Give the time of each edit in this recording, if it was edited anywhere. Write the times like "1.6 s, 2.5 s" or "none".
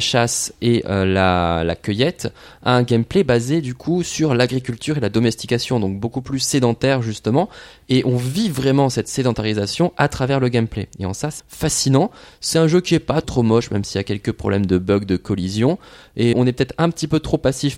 11.4 s, 13.2 s, 16.3 s